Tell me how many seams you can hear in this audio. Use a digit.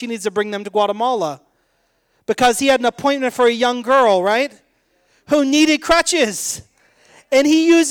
0